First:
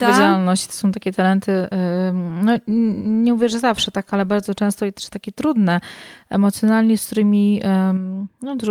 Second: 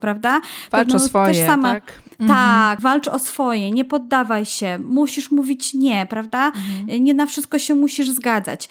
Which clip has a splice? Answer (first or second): second